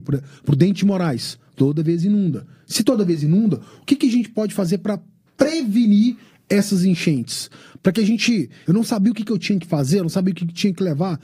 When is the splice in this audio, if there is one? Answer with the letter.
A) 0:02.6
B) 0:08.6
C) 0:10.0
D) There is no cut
B